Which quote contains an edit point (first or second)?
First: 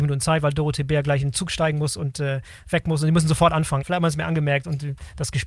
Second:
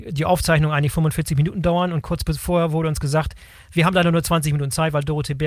first